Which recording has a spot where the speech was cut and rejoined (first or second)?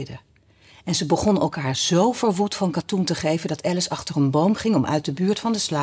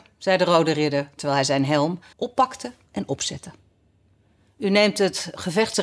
second